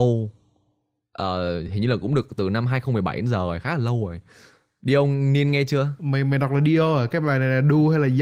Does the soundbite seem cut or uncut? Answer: uncut